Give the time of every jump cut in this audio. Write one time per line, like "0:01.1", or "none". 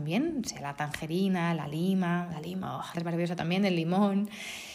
0:02.9